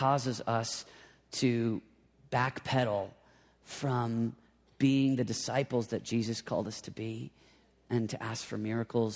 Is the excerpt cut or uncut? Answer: uncut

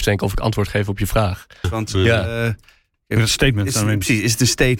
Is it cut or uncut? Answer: cut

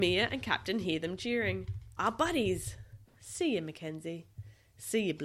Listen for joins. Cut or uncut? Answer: cut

